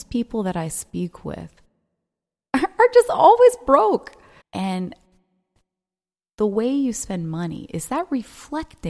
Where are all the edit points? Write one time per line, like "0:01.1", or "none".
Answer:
0:04.4